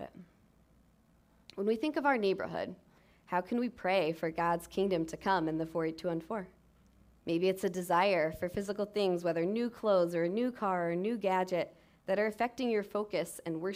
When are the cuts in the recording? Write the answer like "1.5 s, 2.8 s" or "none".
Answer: 1.4 s, 7.2 s